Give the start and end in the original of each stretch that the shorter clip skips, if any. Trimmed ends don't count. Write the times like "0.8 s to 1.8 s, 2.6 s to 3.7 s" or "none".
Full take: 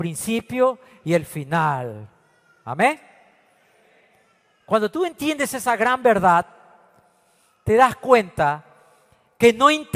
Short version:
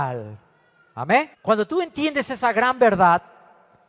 3.0 s to 4.6 s